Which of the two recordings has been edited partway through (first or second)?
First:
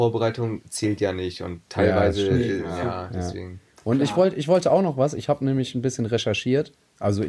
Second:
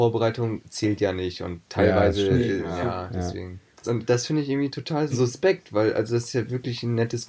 second